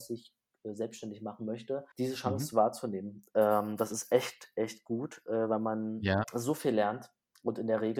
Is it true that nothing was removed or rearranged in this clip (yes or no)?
no